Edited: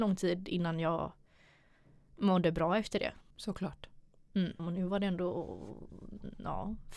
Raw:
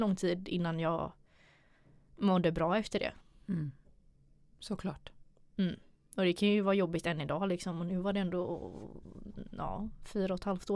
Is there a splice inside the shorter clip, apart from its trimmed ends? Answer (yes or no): yes